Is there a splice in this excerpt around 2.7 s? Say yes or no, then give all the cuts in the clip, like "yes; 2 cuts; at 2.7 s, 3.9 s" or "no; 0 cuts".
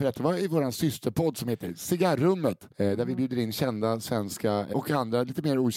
yes; 2 cuts; at 2.7 s, 4.7 s